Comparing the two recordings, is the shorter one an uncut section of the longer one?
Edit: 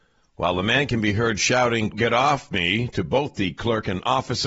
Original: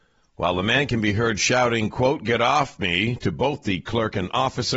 no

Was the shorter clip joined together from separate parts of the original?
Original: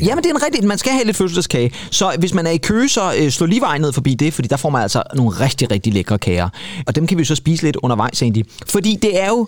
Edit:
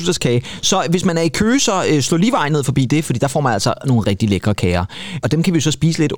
yes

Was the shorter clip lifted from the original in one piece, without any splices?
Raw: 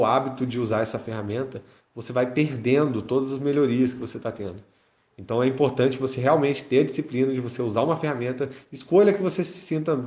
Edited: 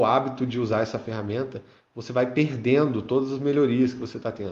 yes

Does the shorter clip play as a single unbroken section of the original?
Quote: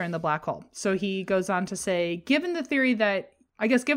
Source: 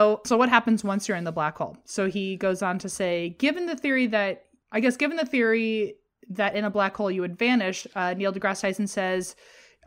yes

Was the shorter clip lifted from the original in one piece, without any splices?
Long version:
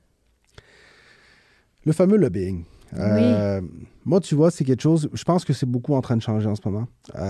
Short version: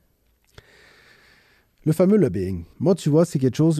no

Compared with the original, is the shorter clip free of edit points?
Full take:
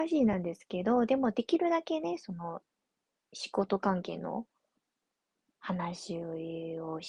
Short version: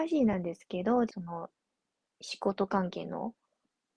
no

